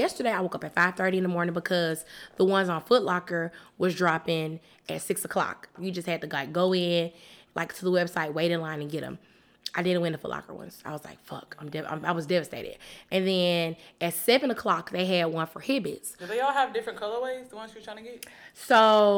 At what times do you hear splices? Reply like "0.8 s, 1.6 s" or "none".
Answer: 5.8 s